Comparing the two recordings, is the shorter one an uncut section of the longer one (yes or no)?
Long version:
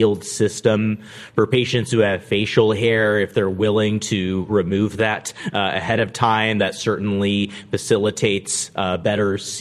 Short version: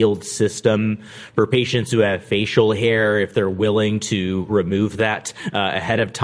yes